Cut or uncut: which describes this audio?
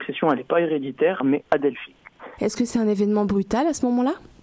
cut